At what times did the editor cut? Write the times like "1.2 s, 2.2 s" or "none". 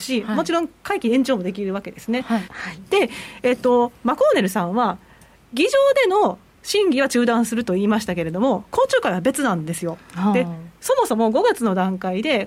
2.5 s